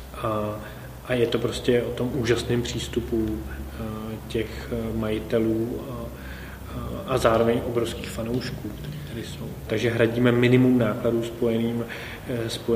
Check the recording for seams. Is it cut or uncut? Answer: cut